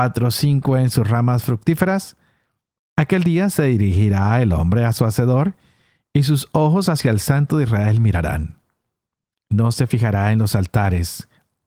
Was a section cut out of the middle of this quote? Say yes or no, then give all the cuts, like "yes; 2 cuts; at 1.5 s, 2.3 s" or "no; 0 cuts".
yes; 1 cut; at 2.8 s